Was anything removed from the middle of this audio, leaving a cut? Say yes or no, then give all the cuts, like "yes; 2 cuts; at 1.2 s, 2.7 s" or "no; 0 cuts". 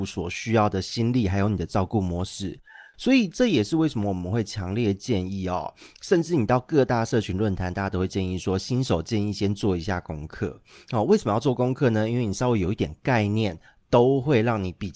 no; 0 cuts